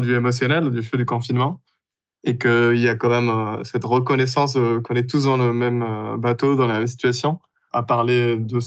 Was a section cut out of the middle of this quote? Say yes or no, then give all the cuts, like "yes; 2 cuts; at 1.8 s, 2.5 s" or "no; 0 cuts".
no; 0 cuts